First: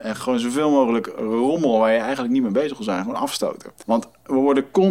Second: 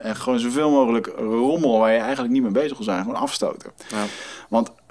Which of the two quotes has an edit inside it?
first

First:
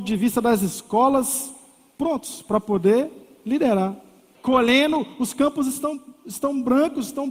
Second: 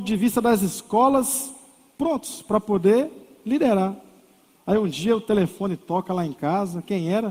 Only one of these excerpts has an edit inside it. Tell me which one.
first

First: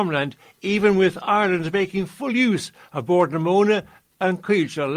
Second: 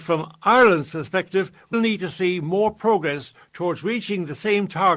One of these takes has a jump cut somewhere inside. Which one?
second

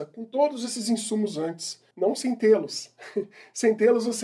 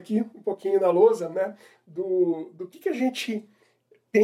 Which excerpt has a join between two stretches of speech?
first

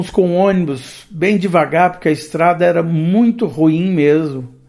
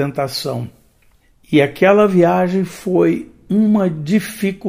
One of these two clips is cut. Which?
second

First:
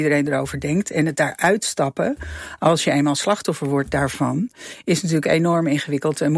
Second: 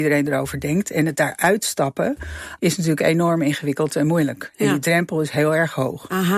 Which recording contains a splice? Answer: second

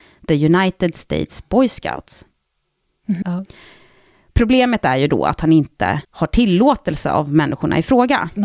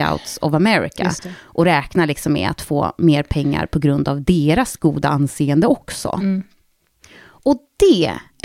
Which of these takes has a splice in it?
first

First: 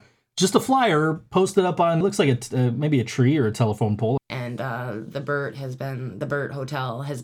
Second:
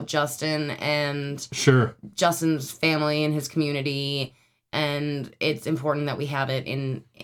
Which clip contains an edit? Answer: first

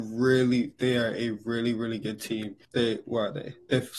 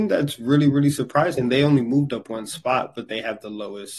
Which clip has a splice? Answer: first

